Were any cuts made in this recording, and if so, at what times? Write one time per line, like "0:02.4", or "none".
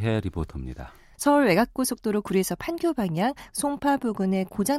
0:01.1

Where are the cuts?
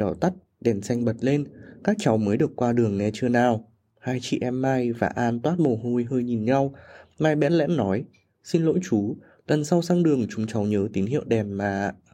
none

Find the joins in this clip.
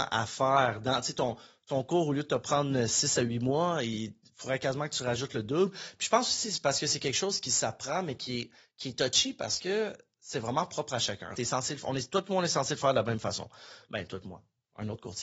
0:11.3

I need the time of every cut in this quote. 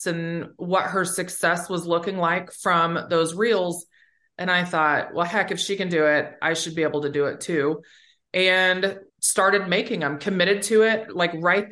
0:09.1

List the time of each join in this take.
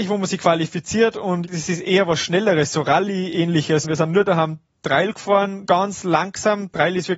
0:03.8
0:05.7

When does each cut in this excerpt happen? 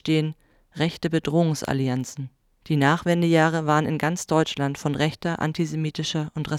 0:02.6

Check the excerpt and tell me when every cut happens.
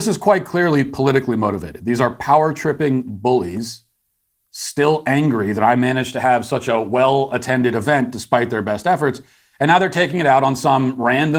none

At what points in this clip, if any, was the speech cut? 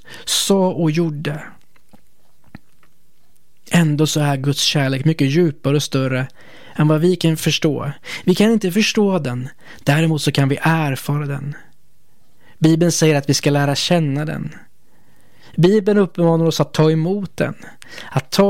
none

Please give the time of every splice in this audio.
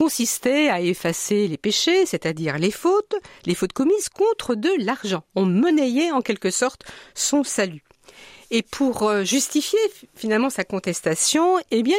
none

